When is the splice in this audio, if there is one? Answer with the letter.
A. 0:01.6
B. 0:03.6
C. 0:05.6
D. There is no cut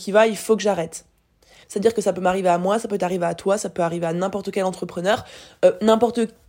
A